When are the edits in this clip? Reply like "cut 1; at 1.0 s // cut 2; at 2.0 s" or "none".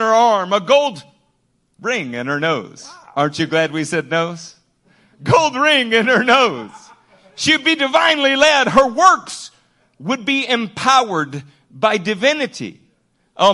none